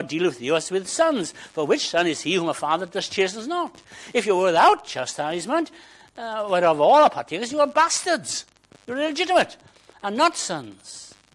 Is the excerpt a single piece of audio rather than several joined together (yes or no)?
yes